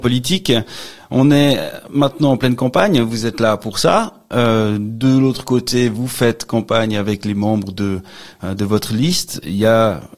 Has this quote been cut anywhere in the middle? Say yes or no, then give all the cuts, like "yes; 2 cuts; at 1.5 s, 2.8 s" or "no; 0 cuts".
no; 0 cuts